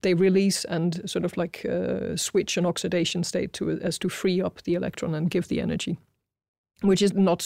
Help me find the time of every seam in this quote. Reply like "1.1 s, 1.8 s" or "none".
none